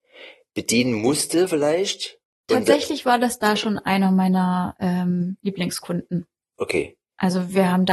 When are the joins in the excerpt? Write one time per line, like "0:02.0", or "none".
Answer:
none